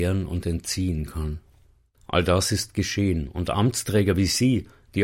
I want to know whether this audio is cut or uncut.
uncut